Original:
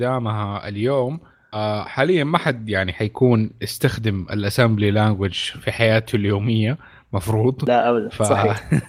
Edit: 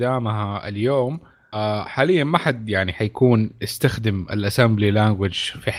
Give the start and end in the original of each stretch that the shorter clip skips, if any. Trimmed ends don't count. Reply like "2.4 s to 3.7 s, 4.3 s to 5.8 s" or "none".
none